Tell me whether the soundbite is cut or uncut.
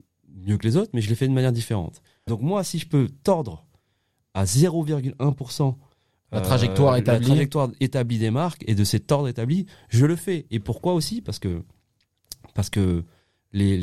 cut